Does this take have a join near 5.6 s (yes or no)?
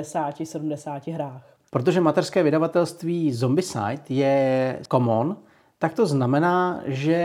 no